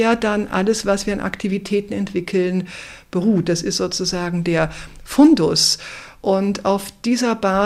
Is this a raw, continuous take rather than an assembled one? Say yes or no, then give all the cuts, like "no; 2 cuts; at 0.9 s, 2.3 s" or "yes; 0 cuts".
yes; 0 cuts